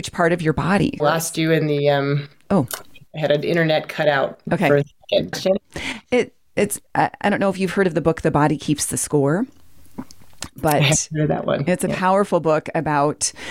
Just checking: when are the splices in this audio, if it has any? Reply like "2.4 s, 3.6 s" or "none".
1.0 s, 5.3 s